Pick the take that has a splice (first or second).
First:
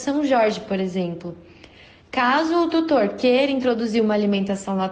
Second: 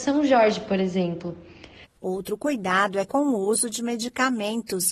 second